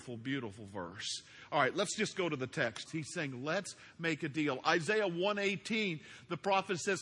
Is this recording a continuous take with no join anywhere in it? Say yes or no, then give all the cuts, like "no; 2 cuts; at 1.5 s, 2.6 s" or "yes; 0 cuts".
no; 1 cut; at 2.9 s